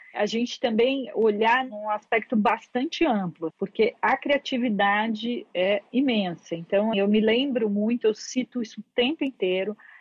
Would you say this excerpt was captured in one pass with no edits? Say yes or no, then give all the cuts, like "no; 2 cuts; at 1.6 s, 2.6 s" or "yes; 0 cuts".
no; 2 cuts; at 3.5 s, 6.9 s